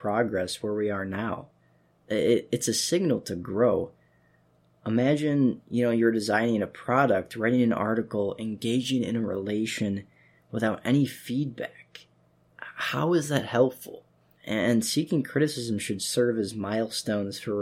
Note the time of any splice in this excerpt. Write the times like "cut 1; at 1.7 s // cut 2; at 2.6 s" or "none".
cut 1; at 14.4 s